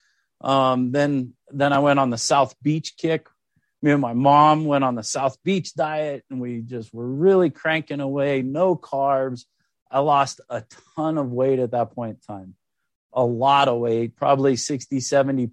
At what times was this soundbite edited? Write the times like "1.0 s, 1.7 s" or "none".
none

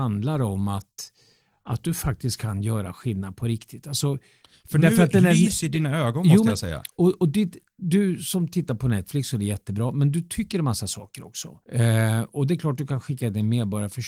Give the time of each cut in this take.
11.6 s

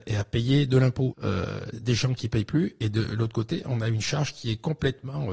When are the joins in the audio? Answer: 1.1 s

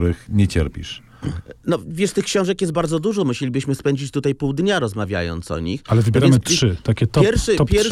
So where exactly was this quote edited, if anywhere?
2.7 s

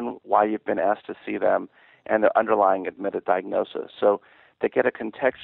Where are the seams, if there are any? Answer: none

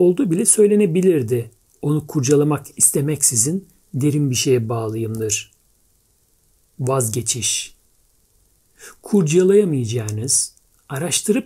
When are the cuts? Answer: none

